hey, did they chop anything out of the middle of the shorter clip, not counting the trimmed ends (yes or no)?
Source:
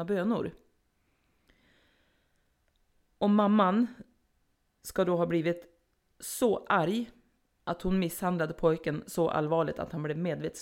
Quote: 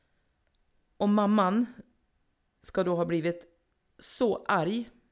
no